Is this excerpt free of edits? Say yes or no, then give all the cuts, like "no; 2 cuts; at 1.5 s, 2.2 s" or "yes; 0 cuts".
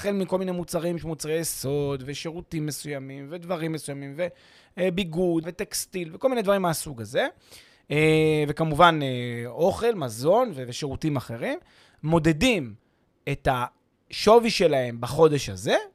no; 1 cut; at 5.4 s